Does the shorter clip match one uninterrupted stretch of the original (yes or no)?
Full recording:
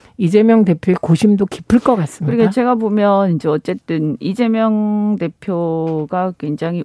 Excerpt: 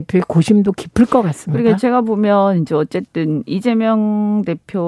yes